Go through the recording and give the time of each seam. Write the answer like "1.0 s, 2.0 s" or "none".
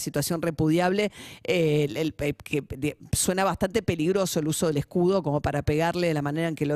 none